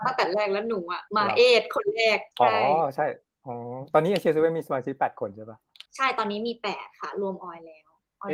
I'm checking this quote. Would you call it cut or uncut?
cut